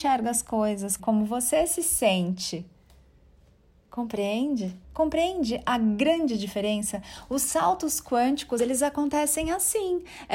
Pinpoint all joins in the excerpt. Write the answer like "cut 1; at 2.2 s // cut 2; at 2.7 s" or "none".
cut 1; at 1.0 s // cut 2; at 4.8 s // cut 3; at 8.6 s